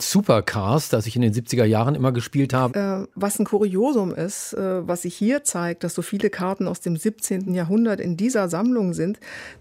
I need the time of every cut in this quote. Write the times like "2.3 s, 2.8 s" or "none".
2.7 s, 7.5 s

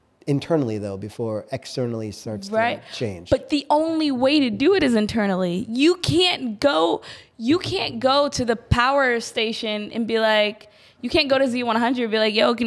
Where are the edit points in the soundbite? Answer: none

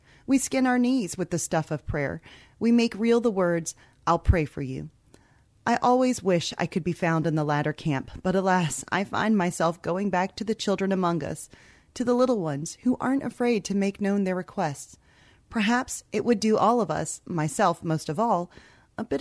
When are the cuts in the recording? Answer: none

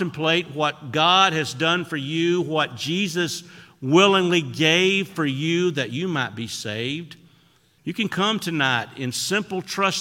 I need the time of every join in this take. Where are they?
7.8 s

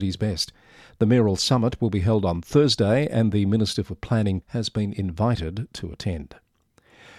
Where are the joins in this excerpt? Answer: 4.4 s

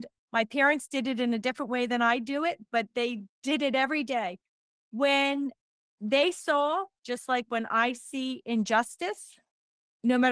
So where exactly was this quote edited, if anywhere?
none

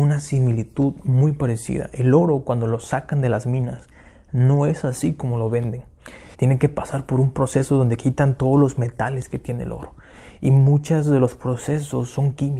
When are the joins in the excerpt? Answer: 6.3 s

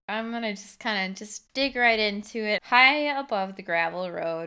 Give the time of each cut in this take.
2.6 s

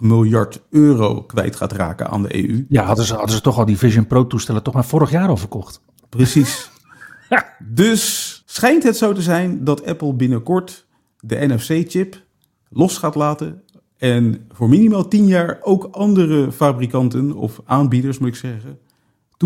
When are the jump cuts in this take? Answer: 8.4 s

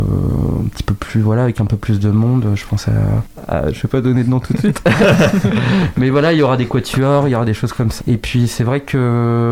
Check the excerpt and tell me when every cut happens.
8.0 s

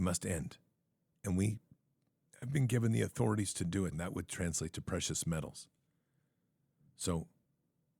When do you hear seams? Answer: 3.9 s

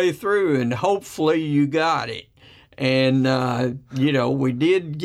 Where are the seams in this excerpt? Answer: none

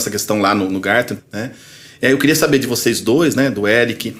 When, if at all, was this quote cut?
1.2 s

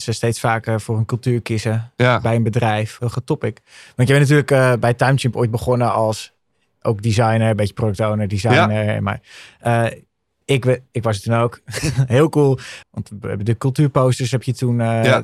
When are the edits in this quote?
3.0 s, 12.8 s

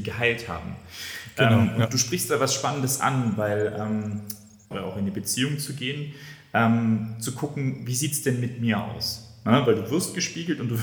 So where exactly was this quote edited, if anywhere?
4.7 s

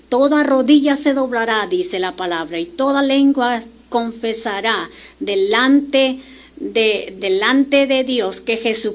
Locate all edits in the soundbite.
7.2 s

